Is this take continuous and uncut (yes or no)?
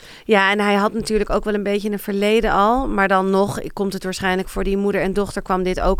yes